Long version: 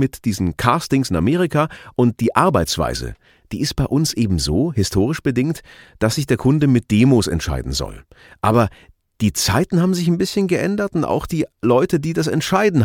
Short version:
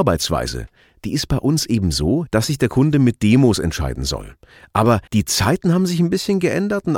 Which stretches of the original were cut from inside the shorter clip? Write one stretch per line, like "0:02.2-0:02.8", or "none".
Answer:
0:04.7-0:05.9
0:08.8-0:09.1